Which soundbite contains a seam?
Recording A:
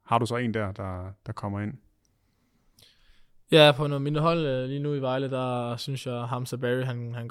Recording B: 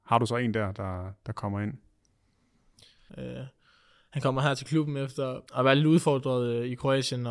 B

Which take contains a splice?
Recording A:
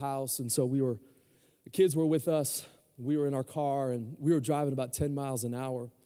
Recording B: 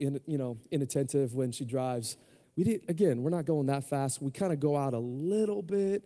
B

